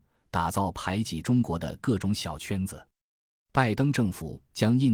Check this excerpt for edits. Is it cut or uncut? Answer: cut